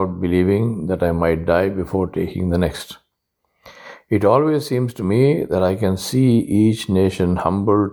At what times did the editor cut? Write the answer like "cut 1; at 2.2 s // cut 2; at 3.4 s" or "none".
none